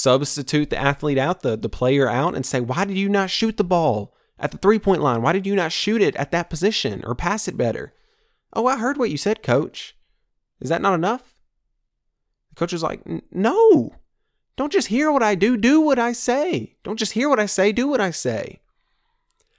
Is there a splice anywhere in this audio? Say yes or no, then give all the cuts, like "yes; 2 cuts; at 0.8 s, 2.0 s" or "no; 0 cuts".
no; 0 cuts